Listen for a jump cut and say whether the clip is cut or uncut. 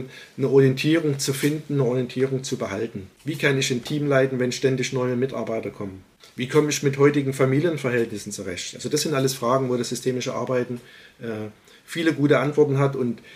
cut